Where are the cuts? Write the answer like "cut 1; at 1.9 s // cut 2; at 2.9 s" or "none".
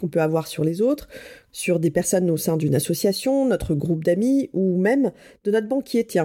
cut 1; at 1.5 s